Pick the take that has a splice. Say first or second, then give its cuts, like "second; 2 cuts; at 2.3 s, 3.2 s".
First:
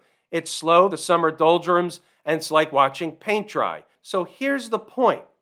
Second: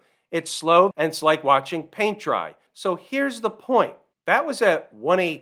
second; 1 cut; at 0.9 s